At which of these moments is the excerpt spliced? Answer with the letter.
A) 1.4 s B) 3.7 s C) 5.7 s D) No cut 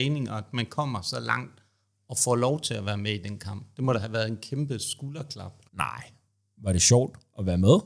C